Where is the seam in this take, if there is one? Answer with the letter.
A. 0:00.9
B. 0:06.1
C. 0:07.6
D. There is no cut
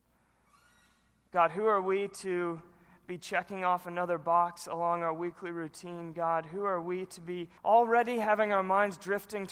C